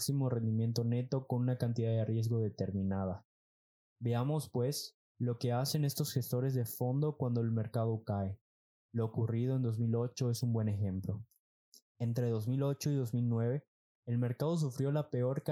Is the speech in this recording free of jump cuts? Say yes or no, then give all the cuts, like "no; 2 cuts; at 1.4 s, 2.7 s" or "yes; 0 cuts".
yes; 0 cuts